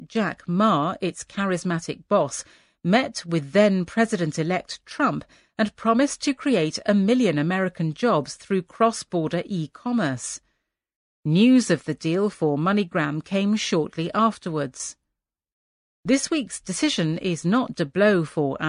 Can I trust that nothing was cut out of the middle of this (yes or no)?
no